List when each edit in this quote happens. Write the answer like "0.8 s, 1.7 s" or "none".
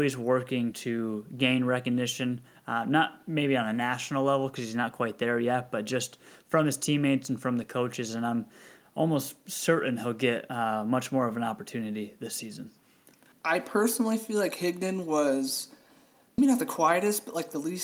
13.3 s, 16.4 s